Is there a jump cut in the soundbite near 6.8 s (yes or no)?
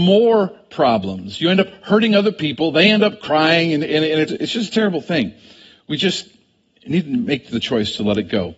no